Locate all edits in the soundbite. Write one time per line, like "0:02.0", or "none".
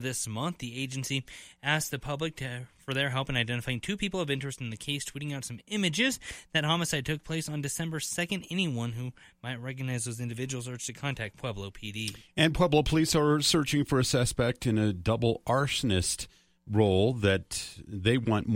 none

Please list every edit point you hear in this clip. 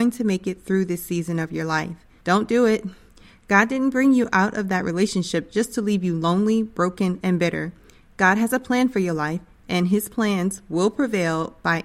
0:02.2

